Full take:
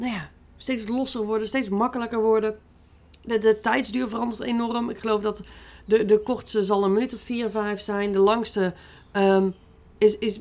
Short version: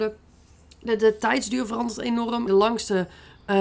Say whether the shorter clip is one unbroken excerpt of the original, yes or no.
no